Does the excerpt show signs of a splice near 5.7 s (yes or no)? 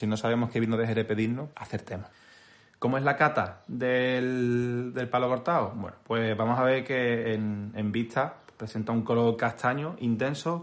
no